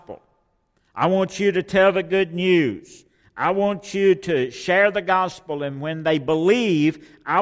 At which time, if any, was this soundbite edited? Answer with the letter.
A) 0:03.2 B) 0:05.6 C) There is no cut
C